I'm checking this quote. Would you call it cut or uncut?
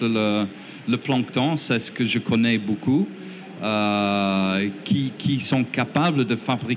uncut